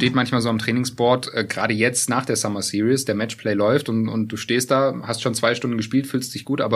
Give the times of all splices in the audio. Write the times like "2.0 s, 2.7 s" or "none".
none